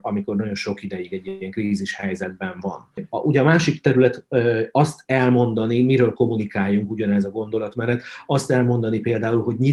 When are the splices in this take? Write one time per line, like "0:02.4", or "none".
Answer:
none